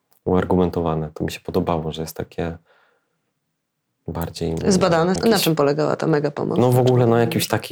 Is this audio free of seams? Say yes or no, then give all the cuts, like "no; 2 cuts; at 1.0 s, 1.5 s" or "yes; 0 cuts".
no; 1 cut; at 5.2 s